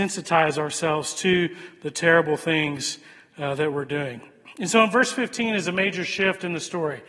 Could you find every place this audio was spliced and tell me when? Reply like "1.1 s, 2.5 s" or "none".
none